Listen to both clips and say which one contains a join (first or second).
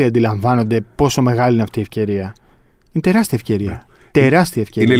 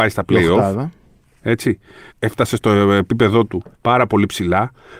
second